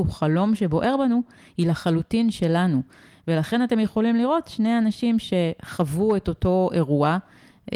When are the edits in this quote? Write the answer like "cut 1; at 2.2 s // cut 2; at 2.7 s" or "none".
none